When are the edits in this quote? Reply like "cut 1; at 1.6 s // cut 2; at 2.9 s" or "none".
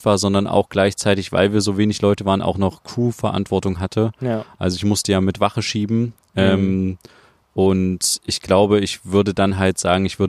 none

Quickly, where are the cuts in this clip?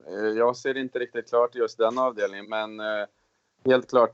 cut 1; at 2.4 s

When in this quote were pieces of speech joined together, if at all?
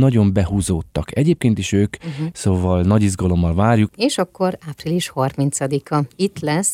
cut 1; at 2.3 s

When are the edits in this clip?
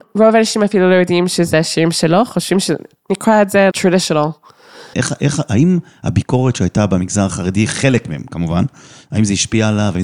cut 1; at 3.7 s // cut 2; at 4.9 s

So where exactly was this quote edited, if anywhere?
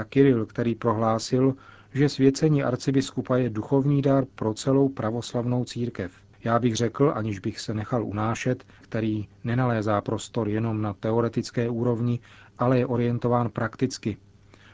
cut 1; at 8.8 s

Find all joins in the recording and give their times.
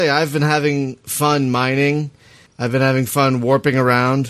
cut 1; at 2.5 s

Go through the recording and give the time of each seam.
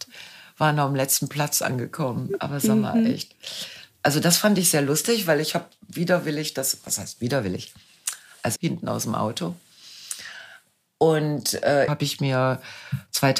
cut 1; at 8.6 s // cut 2; at 11.9 s

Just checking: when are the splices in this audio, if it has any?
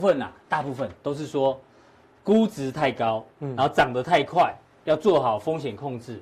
none

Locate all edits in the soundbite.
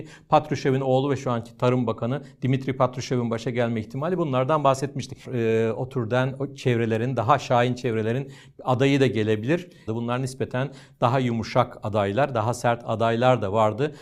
cut 1; at 5.2 s // cut 2; at 9.9 s

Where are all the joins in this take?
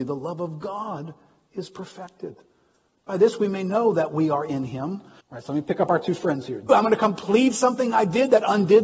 cut 1; at 5.2 s // cut 2; at 6.7 s

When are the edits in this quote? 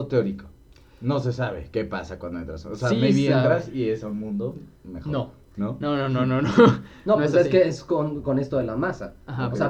none

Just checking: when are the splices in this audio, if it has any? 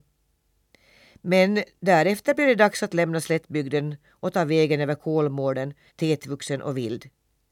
cut 1; at 5.9 s

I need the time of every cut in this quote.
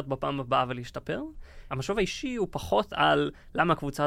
cut 1; at 1.7 s

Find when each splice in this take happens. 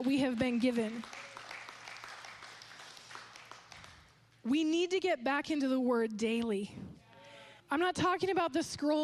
cut 1; at 7.6 s

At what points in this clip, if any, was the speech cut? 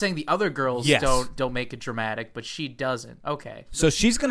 cut 1; at 3.2 s

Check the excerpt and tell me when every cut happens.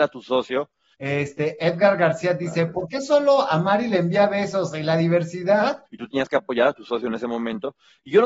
cut 1; at 0.9 s // cut 2; at 5.9 s

